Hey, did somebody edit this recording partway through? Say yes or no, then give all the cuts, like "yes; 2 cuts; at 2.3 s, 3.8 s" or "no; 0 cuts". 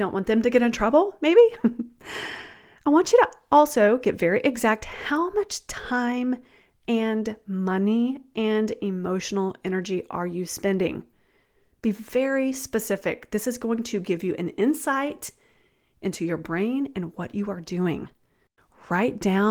no; 0 cuts